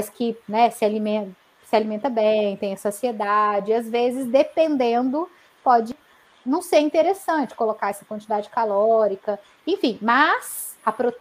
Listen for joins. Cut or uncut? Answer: uncut